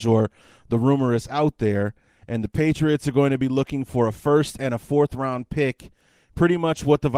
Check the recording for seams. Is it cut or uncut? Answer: uncut